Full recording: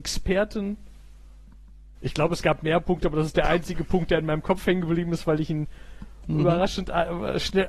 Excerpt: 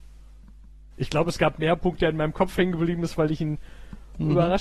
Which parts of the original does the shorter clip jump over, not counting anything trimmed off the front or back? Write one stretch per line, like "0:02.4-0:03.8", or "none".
0:03.0-0:04.1